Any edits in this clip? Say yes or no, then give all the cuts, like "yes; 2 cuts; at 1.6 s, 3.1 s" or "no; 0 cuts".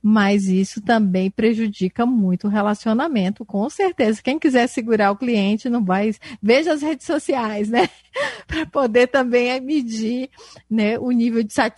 no; 0 cuts